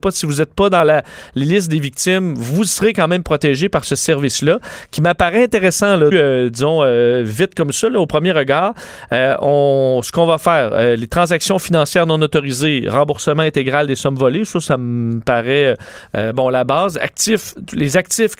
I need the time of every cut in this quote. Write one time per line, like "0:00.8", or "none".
0:06.1